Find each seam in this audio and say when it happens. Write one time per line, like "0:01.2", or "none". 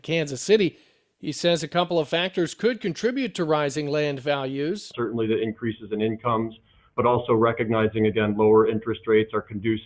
none